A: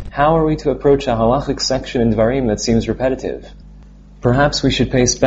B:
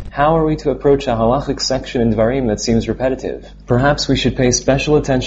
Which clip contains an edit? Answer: B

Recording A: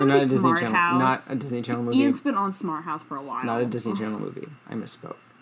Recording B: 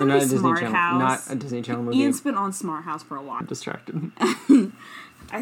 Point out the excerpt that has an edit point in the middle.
B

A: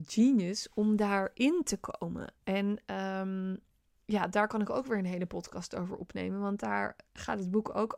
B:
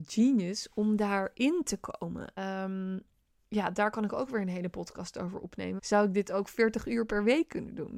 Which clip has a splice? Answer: B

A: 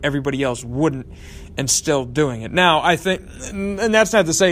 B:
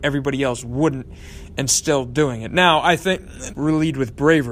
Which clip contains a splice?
B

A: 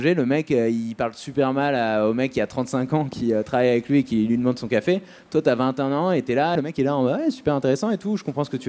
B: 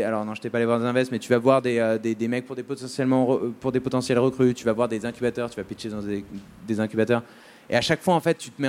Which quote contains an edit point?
A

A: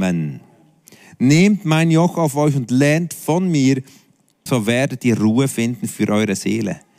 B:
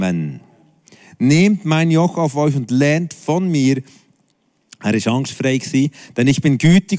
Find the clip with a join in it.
A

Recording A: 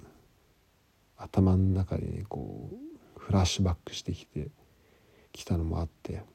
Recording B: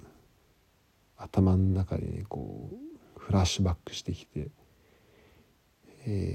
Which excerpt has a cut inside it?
A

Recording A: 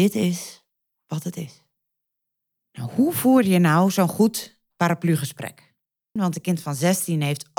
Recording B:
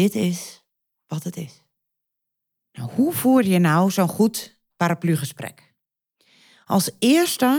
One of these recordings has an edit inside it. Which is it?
A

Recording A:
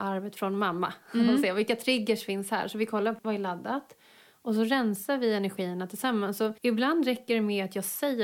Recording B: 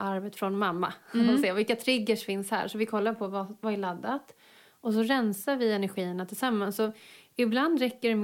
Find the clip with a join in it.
A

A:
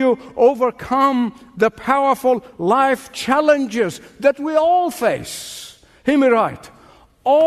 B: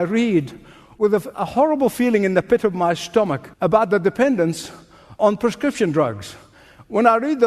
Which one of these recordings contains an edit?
B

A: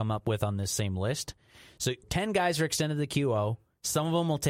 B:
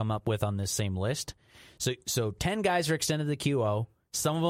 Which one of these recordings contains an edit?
A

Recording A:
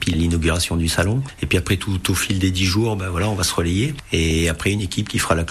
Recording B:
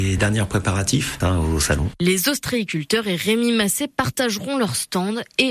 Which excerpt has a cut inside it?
B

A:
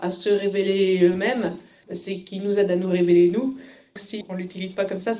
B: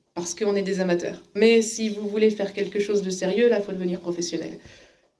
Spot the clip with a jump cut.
A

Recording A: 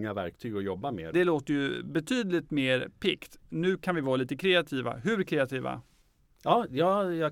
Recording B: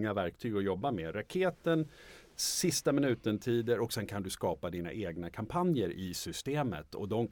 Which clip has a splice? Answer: A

